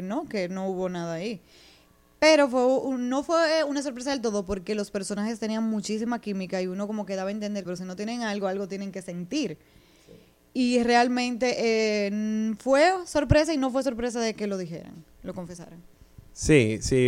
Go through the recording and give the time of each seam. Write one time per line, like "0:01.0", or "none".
0:07.6

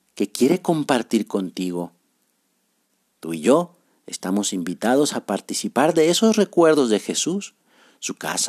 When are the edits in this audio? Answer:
none

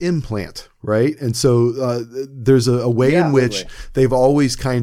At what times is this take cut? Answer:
none

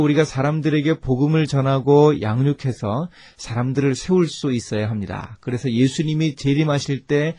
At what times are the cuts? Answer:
none

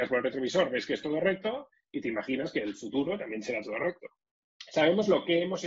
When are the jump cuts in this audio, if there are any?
0:04.4

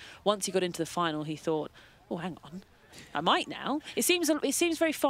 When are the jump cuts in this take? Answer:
none

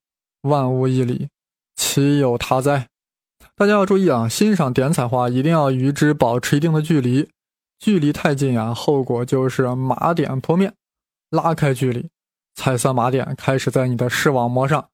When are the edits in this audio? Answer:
none

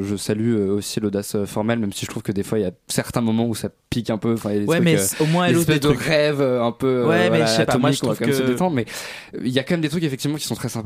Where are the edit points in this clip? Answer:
none

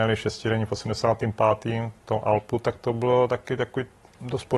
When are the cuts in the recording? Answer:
none

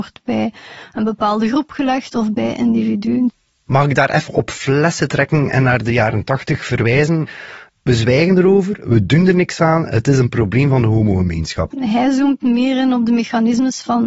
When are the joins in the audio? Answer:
0:07.7
0:11.7

